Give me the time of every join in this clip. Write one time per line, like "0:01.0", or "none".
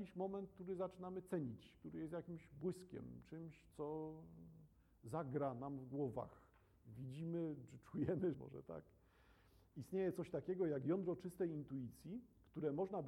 0:08.3